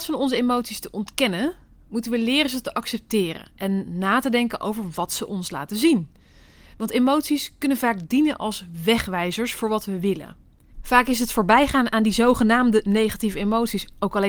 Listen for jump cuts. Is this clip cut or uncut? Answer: cut